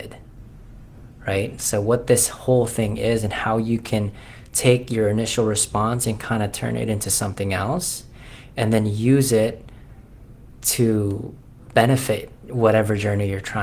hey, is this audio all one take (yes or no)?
yes